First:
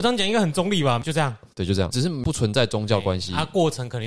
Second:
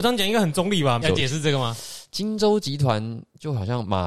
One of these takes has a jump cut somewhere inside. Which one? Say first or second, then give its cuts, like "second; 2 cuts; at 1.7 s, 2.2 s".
second; 1 cut; at 1.0 s